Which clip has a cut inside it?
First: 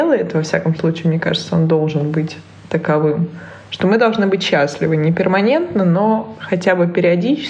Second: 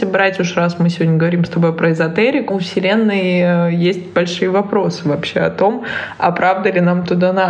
second; 1 cut; at 2.5 s

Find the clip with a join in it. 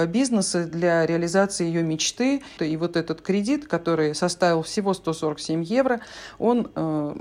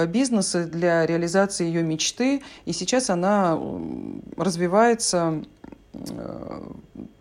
first; 1 cut; at 2.6 s

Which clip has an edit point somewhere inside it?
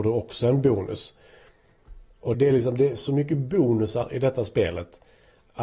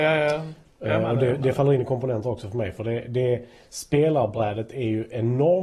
first; 1 cut; at 2.3 s

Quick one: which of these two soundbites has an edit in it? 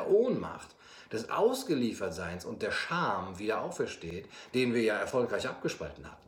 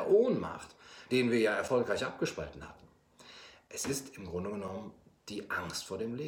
second; 1 cut; at 1.1 s

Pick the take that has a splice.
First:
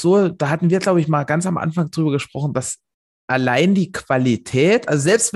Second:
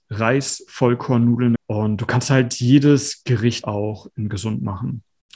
second; 2 cuts; at 1.6 s, 3.6 s

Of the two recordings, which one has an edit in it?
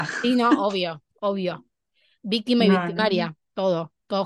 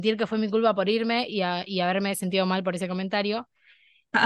first; 1 cut; at 1.1 s

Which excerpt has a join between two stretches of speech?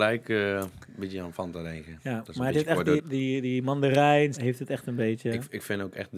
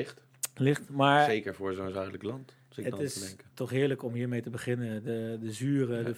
first; 2 cuts; at 3.0 s, 4.3 s

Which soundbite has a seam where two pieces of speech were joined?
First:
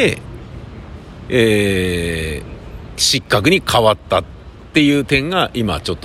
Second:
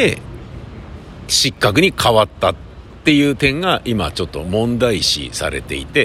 second; 1 cut; at 1.3 s

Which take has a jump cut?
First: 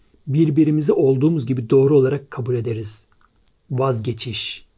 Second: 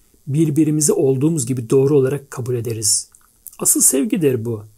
first; 1 cut; at 3.5 s

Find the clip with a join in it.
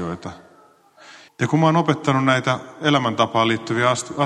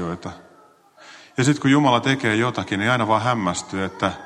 first; 1 cut; at 1.3 s

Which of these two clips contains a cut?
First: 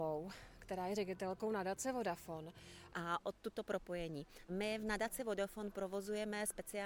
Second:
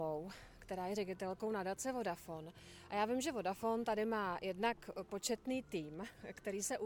first; 2 cuts; at 2.9 s, 4.5 s

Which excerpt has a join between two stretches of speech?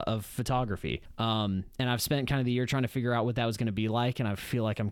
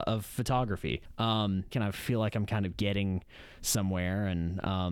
second; 1 cut; at 1.7 s

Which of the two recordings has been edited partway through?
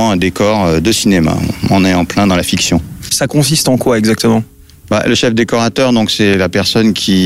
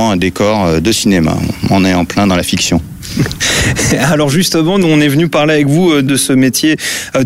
first; 1 cut; at 3.1 s

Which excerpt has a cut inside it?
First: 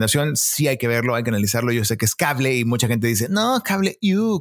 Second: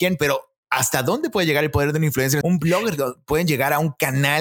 second; 1 cut; at 2.4 s

